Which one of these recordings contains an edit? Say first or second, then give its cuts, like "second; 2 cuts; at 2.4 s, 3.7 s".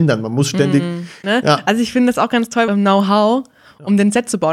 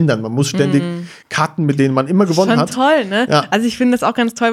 first; 2 cuts; at 1.2 s, 2.7 s